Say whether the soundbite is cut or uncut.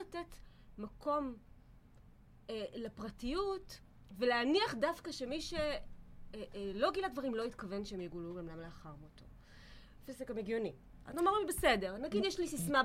cut